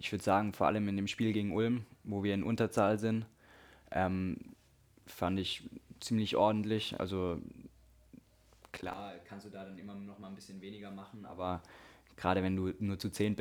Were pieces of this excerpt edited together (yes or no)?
no